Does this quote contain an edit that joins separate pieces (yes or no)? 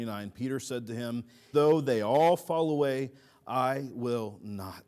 yes